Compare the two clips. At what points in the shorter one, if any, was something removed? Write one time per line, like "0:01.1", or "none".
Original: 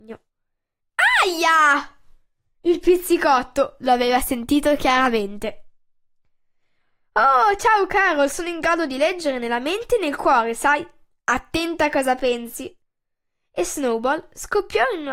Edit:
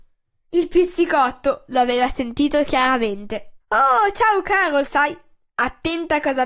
0:03.6
0:04.9